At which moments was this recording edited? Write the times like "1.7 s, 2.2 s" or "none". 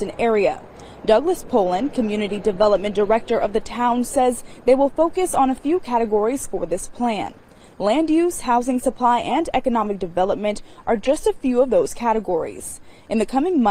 none

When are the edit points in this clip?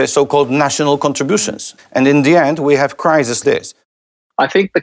1.8 s, 3.4 s

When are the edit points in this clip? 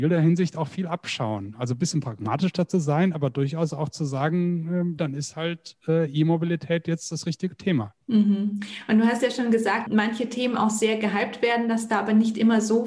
5.0 s, 8.0 s, 9.9 s

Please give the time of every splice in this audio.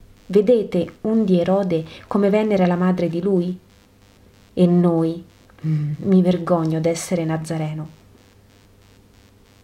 none

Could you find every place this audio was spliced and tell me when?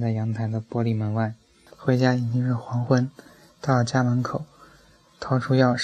1.7 s

